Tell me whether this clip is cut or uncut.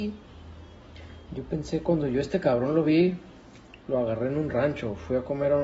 cut